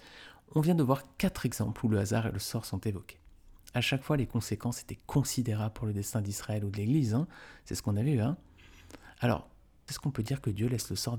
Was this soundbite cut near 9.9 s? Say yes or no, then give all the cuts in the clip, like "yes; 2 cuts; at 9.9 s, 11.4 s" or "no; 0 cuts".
yes; 1 cut; at 9.9 s